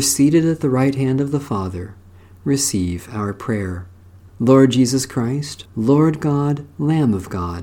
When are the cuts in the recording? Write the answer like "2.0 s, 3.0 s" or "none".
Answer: 4.3 s, 5.7 s